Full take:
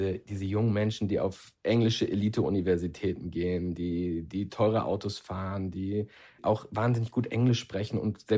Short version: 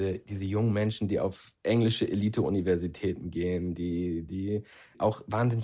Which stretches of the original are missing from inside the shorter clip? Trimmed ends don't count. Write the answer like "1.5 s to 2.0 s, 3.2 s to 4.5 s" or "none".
4.3 s to 5.7 s